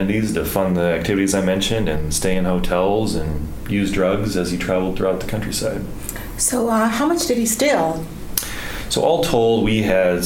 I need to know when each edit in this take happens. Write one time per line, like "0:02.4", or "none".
none